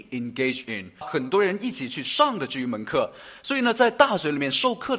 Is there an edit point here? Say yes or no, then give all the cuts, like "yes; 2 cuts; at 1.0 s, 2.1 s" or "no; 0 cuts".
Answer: yes; 1 cut; at 1.0 s